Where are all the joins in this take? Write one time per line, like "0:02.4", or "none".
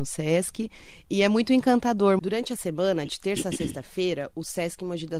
0:02.2

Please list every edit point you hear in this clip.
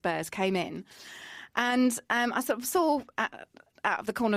none

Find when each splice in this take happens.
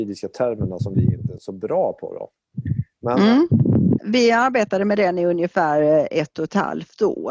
0:01.4
0:04.0

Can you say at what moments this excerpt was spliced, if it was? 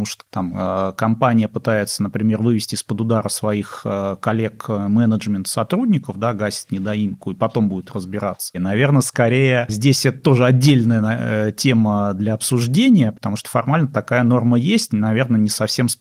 0:08.5
0:14.9

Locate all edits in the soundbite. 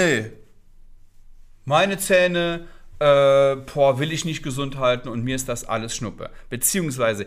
none

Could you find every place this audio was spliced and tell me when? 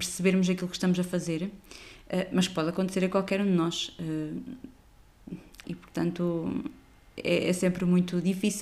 0:05.6

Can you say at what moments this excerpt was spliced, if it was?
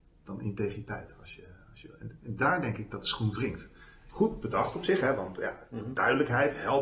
none

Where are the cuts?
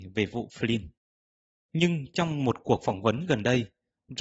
0:01.5

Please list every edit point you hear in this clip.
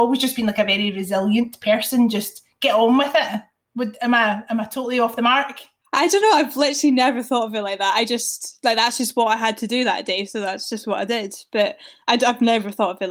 none

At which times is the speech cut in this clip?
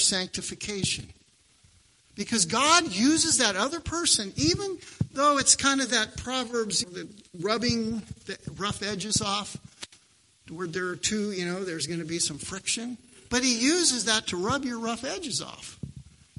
0:06.8

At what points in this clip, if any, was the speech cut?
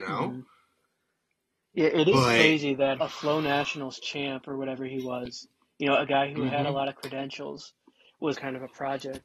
0:03.0
0:08.3

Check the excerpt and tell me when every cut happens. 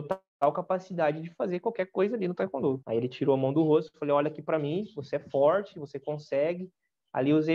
0:02.8

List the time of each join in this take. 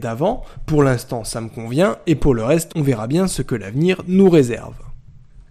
none

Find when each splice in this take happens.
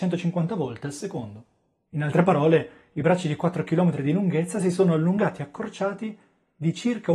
0:01.9

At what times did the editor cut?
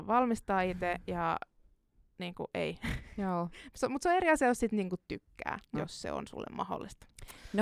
0:05.7

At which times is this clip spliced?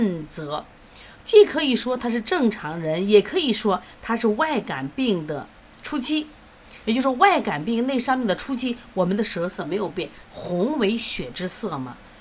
0:06.8
0:10.2

